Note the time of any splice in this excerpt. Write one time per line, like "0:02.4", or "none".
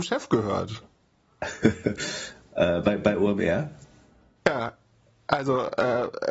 none